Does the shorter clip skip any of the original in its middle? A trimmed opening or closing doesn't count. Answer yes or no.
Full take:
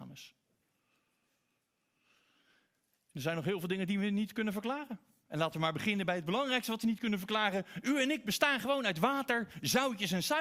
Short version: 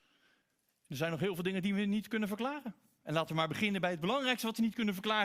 no